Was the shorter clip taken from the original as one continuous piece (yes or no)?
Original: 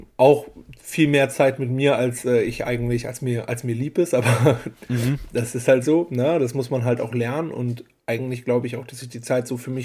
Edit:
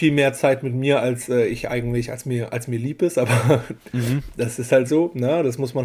yes